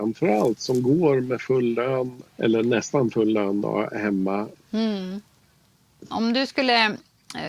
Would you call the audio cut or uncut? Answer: cut